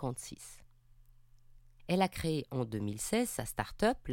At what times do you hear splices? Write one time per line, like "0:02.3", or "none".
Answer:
0:01.8